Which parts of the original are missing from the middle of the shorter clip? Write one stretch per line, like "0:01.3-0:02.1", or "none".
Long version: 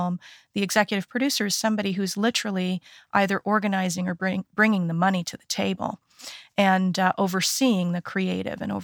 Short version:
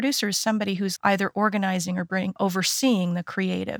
0:02.1-0:03.1
0:04.5-0:07.1